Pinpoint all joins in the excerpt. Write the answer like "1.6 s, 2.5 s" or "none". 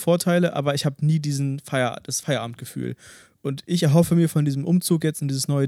none